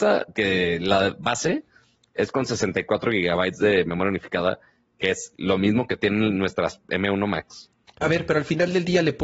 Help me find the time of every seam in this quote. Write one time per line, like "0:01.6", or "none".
0:08.0